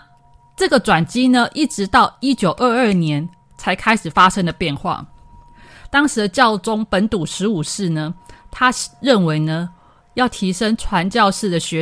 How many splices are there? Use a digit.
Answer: 0